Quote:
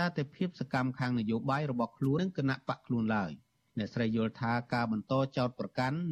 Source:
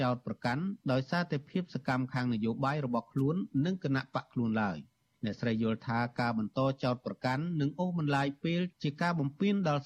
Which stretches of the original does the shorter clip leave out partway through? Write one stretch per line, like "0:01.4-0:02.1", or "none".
0:03.3-0:03.6